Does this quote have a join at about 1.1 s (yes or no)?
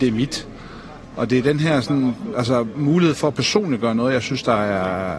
no